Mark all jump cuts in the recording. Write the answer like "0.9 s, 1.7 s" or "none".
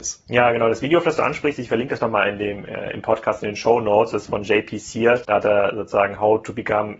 5.2 s

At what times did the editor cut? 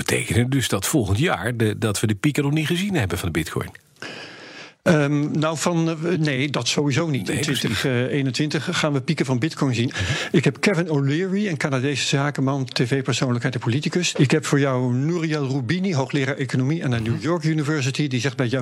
9.9 s, 14.1 s

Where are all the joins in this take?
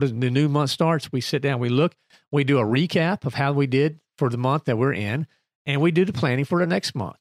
none

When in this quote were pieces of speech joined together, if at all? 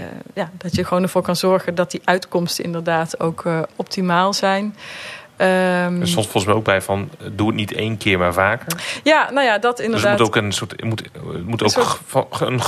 none

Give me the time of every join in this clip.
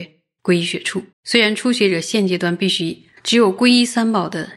1.1 s, 3.2 s

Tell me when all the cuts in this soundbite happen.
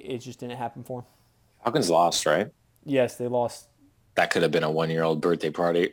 4.1 s

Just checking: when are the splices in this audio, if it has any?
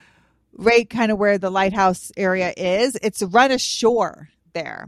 none

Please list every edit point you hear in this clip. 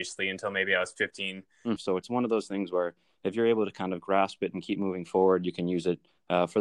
1.8 s

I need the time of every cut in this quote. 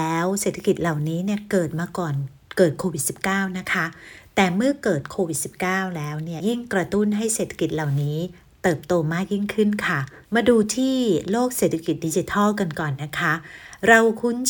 6.4 s, 10.2 s

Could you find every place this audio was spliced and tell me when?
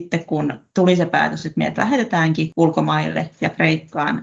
none

